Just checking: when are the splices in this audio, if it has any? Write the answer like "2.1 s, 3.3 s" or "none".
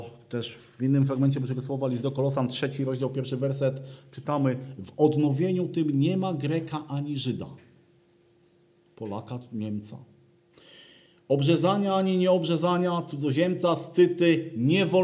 none